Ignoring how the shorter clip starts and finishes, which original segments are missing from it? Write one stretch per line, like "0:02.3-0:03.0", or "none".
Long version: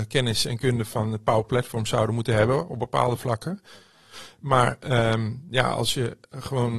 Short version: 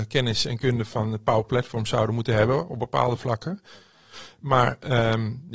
none

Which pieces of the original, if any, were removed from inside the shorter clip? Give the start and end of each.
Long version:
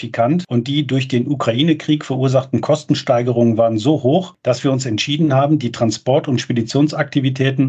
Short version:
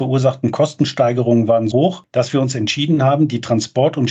0:03.8-0:04.0

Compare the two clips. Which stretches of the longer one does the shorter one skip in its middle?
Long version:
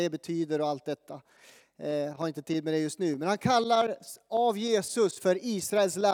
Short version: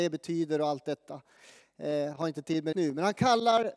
0:02.7-0:03.0

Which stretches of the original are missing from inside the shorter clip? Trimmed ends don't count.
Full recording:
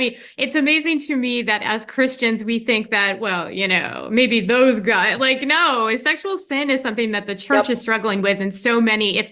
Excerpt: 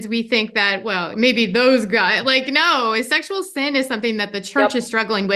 0:03.5-0:04.1

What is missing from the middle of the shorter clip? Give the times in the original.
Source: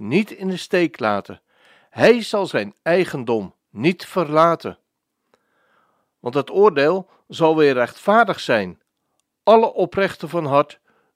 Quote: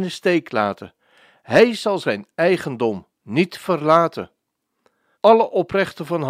0:05.6-0:09.4

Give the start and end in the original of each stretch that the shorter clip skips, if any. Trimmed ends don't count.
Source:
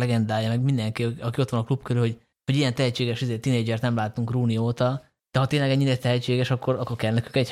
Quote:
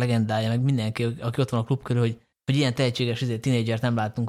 none

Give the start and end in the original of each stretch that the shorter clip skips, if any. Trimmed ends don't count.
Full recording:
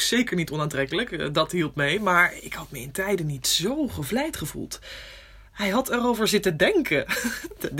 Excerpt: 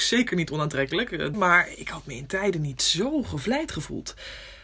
0:01.3-0:02.0

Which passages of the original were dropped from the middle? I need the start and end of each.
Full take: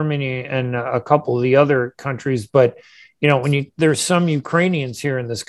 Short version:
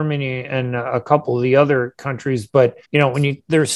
0:02.8-0:03.1

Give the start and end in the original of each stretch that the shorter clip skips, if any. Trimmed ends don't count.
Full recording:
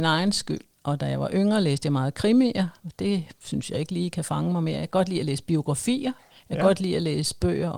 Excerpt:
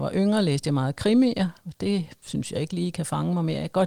none

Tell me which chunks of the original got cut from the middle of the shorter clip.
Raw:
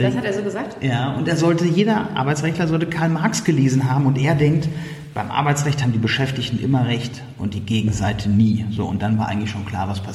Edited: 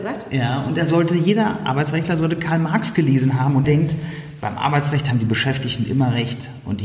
0:04.1-0:04.4

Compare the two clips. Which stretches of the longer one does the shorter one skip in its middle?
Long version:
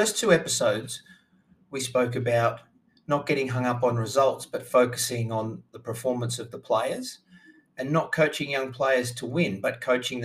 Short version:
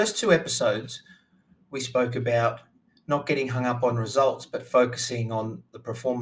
none

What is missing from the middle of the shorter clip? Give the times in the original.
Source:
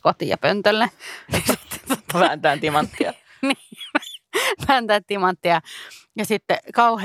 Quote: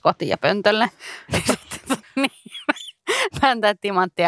0:02.0-0:03.3

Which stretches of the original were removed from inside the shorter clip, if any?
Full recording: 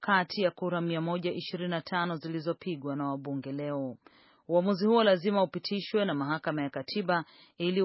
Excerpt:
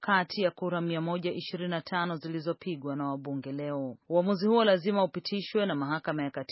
0:04.0-0:04.4

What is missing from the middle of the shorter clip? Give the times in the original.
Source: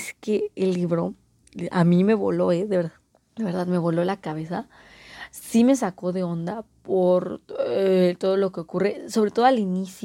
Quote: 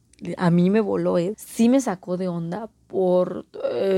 0:02.7-0:05.3

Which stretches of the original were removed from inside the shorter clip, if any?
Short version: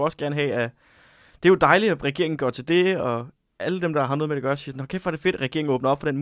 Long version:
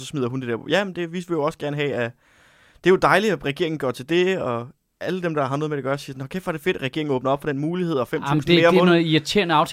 none

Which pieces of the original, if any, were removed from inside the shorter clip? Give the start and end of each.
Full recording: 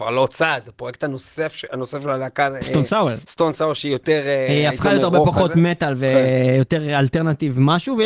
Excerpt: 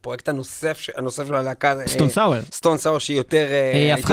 none

